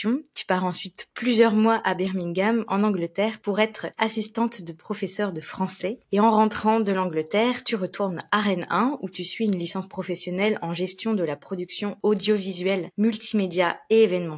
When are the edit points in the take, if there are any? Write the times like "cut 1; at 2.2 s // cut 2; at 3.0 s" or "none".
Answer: none